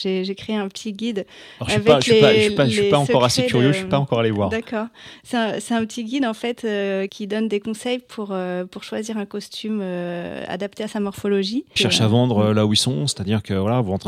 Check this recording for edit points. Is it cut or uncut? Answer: cut